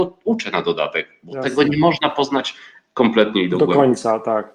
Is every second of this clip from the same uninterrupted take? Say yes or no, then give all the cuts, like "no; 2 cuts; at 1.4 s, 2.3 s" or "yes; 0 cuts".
yes; 0 cuts